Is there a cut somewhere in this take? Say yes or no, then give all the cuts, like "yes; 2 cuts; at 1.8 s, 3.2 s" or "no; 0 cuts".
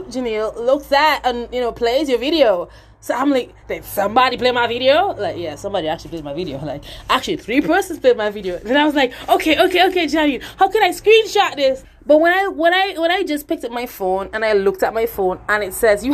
yes; 1 cut; at 11.8 s